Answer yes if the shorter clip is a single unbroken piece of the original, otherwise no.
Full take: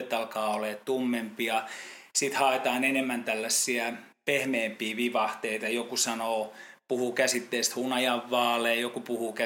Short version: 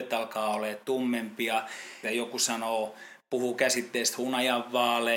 no